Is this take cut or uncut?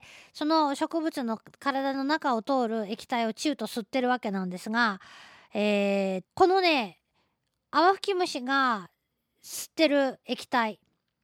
cut